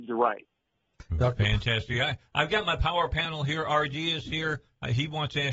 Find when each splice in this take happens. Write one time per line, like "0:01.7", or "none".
none